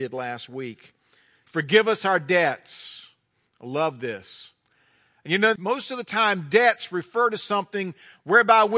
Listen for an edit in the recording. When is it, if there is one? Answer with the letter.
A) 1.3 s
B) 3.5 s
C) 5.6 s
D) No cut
C